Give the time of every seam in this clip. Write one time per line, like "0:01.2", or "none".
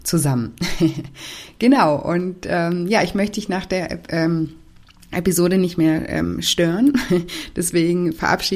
none